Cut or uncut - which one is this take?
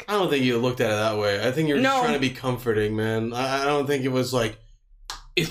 uncut